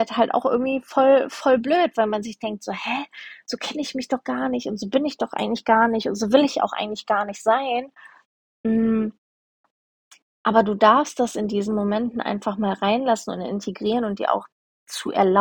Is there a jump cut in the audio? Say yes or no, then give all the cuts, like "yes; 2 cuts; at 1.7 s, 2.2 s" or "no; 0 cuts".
no; 0 cuts